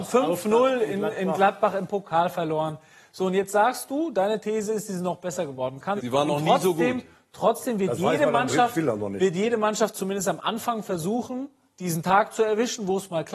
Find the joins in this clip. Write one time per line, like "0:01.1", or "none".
0:06.0